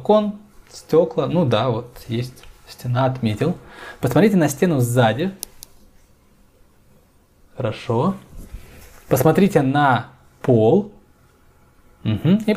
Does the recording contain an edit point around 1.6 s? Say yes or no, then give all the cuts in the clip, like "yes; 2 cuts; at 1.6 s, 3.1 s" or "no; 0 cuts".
no; 0 cuts